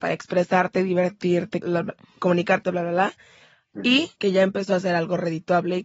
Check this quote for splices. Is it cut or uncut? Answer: cut